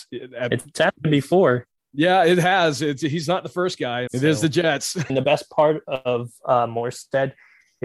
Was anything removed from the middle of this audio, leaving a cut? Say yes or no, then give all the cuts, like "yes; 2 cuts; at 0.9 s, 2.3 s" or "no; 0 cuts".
yes; 2 cuts; at 4.1 s, 5.1 s